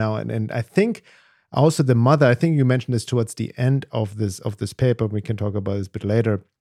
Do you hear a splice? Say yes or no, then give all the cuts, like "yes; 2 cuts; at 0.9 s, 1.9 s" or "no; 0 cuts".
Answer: no; 0 cuts